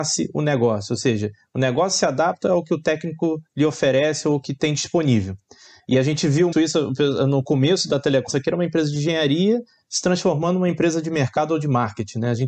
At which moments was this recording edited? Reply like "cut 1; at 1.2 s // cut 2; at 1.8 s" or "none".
cut 1; at 6.5 s // cut 2; at 8.3 s